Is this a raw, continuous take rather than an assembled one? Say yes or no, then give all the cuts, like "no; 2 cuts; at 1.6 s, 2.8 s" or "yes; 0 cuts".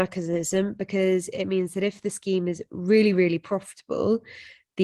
yes; 0 cuts